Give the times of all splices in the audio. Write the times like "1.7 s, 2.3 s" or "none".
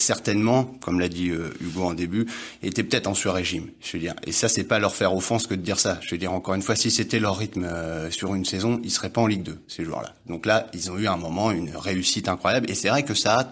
none